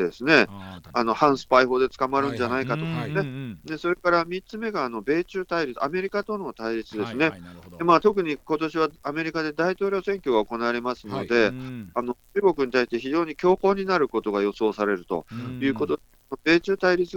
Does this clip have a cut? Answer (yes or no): no